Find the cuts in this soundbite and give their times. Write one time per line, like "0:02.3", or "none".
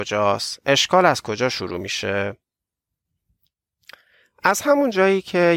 none